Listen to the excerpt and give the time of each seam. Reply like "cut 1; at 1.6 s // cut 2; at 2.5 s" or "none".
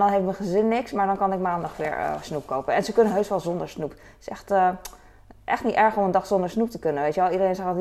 none

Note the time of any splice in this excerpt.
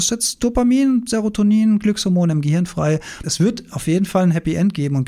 cut 1; at 3.2 s

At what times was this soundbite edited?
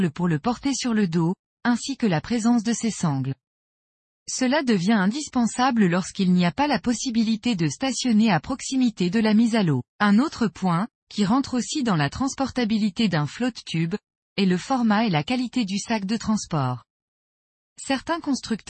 cut 1; at 9.9 s // cut 2; at 14.2 s

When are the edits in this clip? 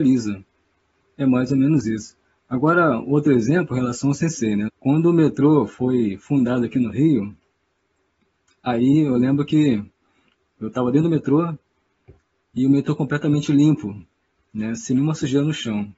cut 1; at 4.7 s

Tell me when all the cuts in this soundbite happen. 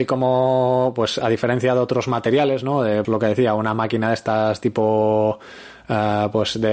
cut 1; at 3.0 s

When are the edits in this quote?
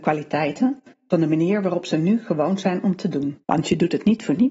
cut 1; at 3.4 s

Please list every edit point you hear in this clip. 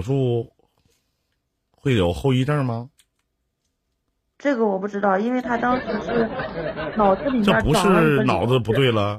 none

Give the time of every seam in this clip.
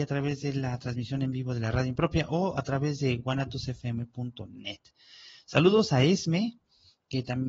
none

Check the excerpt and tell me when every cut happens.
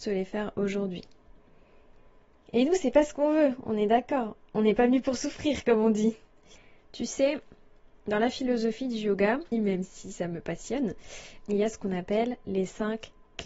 cut 1; at 6.8 s // cut 2; at 9.5 s // cut 3; at 11.4 s

